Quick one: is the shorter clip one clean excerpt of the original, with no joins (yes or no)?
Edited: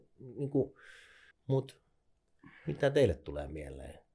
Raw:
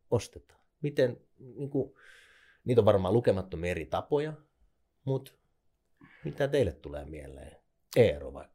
no